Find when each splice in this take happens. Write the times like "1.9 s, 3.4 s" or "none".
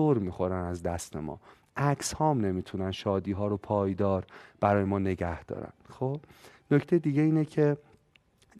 none